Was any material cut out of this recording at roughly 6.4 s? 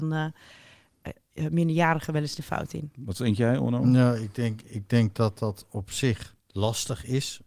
yes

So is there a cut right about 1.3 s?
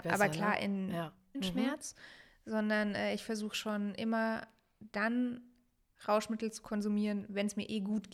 yes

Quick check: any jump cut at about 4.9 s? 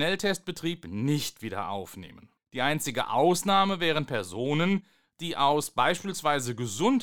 no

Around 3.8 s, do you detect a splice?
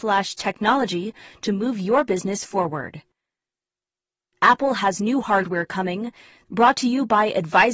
no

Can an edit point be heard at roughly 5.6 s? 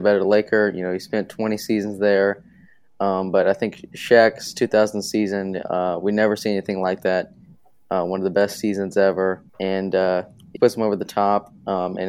no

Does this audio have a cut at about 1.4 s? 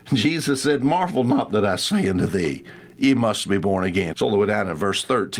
no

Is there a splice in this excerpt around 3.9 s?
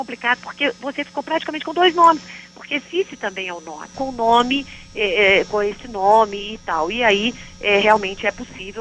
yes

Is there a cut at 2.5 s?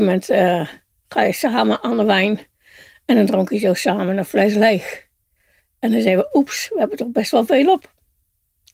no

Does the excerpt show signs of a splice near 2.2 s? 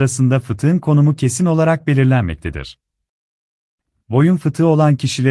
no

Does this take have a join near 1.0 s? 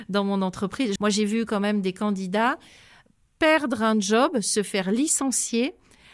yes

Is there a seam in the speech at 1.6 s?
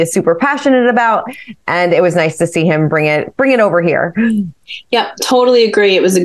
no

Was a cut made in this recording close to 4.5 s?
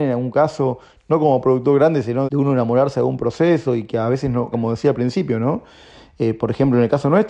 yes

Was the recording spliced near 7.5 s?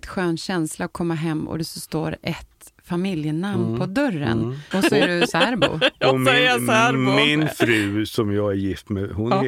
no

